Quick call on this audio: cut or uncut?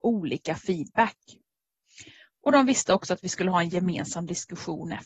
uncut